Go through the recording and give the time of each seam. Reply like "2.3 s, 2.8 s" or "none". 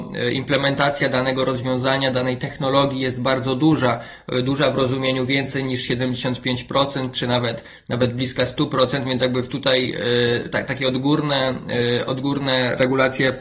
none

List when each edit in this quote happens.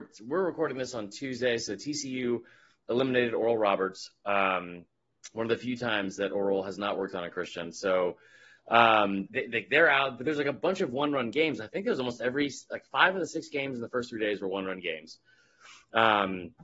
9.3 s

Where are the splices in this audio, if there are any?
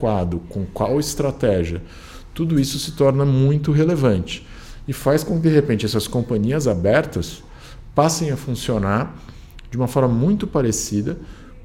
none

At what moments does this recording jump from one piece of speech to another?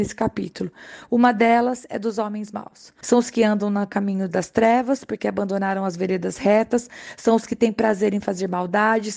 3.0 s

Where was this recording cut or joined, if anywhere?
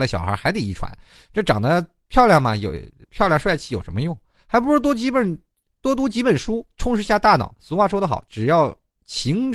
7.5 s

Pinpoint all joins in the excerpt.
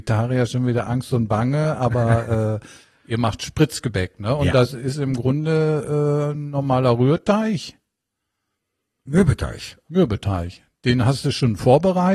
none

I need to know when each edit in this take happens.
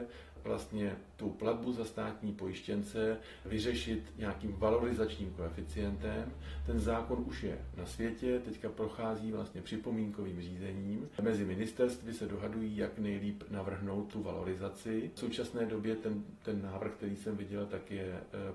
none

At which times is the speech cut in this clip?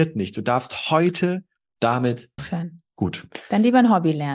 2.4 s

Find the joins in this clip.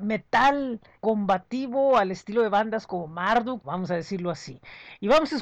0.9 s, 3.6 s

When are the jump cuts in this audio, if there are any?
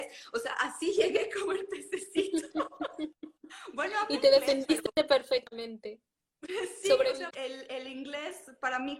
7.3 s

